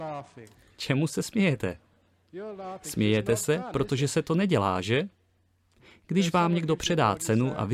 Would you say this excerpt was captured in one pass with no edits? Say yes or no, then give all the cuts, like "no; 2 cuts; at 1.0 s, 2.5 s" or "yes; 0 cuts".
yes; 0 cuts